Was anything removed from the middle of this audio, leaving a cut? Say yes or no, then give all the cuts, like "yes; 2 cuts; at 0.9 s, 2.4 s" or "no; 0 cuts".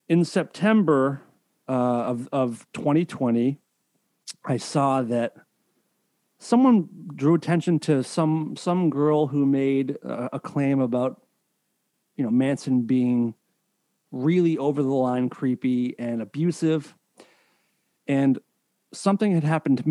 no; 0 cuts